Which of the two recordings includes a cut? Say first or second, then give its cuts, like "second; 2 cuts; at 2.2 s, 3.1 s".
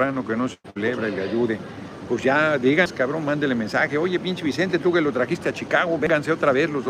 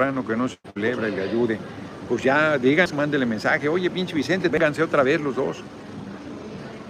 second; 2 cuts; at 2.9 s, 4.5 s